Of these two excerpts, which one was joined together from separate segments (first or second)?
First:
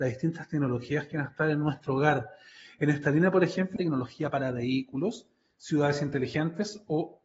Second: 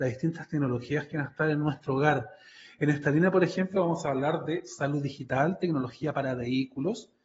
first